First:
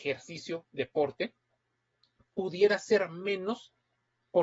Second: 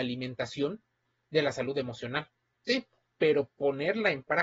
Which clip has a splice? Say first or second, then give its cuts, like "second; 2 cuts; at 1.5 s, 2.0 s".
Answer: second; 1 cut; at 3.1 s